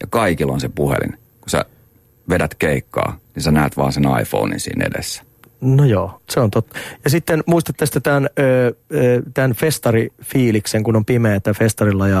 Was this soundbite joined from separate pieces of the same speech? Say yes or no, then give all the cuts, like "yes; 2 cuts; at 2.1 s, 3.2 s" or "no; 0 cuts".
no; 0 cuts